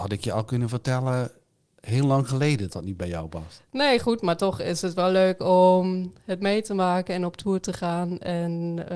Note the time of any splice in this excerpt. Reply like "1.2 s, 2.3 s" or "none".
2.7 s